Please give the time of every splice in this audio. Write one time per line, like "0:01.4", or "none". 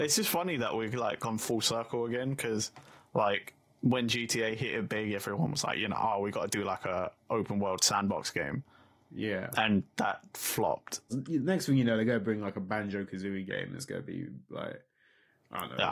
0:11.1